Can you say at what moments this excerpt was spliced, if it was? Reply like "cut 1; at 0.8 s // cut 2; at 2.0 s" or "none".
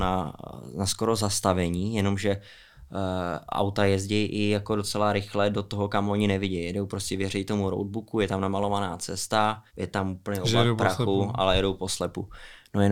cut 1; at 9.7 s